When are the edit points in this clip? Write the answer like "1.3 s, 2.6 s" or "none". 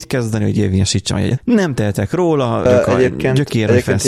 1.4 s, 2.7 s